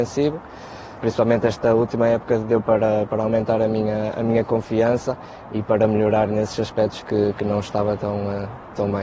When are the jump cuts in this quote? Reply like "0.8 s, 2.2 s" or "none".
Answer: none